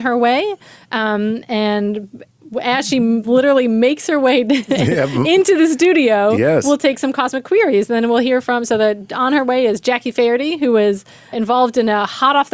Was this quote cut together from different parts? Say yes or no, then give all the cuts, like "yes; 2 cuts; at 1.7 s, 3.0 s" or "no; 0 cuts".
yes; 1 cut; at 11.3 s